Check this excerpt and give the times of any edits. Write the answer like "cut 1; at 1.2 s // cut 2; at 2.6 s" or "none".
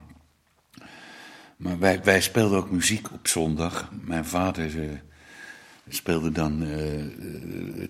none